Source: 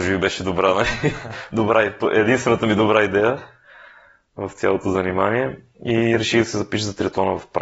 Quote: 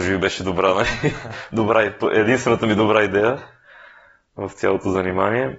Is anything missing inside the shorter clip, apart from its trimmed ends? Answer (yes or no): no